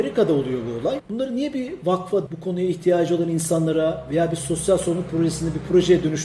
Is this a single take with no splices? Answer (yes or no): no